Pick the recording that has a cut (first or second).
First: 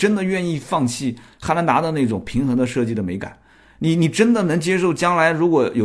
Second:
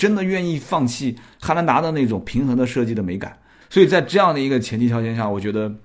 second